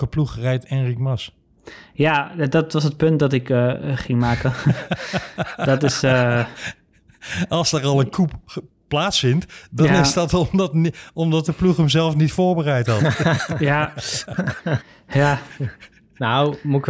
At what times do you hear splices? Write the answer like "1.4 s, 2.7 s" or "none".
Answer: none